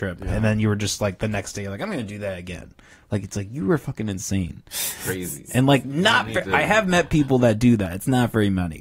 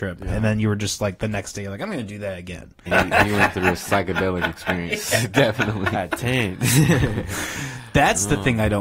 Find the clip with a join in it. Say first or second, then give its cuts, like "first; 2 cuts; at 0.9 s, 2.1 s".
second; 1 cut; at 2.9 s